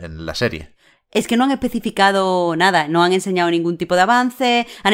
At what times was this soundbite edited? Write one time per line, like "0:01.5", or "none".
0:01.0